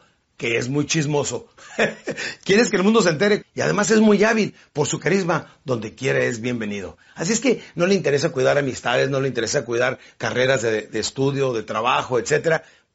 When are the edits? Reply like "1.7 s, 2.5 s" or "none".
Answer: 3.4 s